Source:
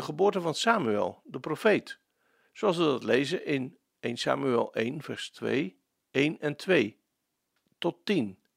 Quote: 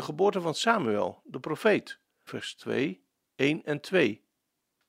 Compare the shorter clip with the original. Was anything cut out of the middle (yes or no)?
yes